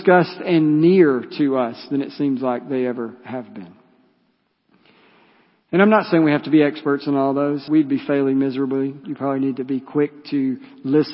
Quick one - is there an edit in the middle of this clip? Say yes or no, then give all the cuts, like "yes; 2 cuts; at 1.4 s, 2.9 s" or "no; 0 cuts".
yes; 2 cuts; at 7.7 s, 9.0 s